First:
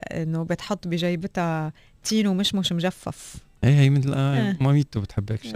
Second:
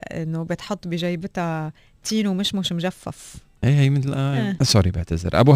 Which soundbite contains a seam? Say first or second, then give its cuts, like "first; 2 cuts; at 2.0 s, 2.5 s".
second; 1 cut; at 4.6 s